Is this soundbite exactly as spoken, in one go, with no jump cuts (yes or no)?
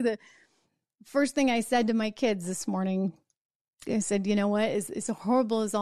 yes